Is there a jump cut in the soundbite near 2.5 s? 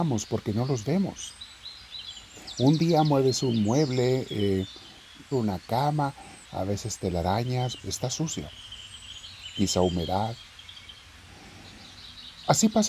no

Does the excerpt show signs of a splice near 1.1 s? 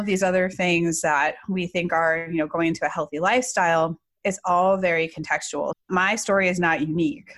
no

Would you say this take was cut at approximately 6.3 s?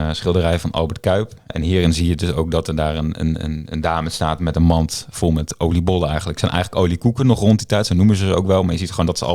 no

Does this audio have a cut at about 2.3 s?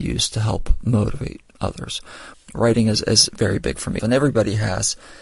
yes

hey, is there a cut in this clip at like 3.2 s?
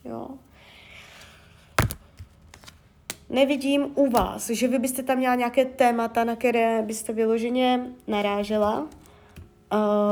no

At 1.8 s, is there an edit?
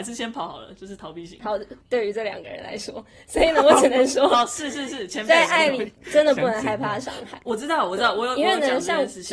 yes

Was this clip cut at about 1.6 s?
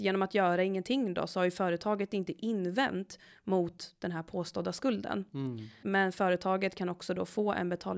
no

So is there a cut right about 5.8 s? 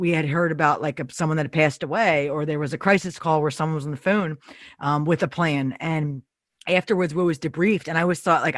no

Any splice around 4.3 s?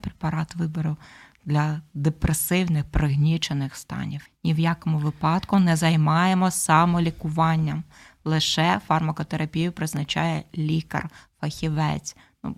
yes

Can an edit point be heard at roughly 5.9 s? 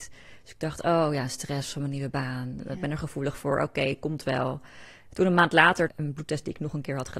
yes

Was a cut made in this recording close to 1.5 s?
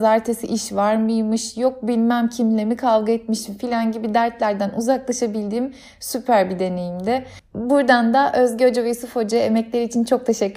no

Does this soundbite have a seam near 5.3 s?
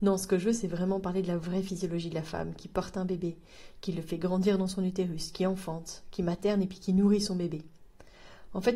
no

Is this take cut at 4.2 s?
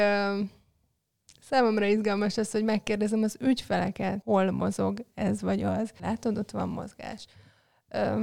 yes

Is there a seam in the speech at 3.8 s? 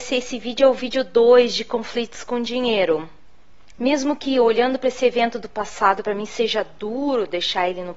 yes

